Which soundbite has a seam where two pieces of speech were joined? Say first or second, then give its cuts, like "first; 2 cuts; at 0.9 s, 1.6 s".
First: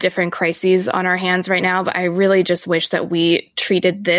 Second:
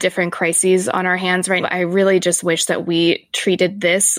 second; 1 cut; at 1.6 s